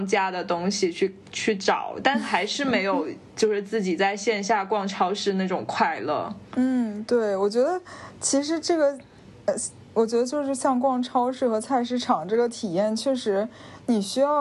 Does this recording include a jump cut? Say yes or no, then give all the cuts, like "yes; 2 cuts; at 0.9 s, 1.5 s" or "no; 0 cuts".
no; 0 cuts